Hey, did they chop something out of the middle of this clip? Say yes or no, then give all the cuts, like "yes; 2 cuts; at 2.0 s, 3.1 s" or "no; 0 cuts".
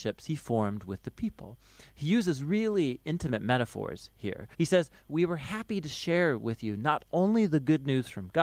yes; 1 cut; at 4.5 s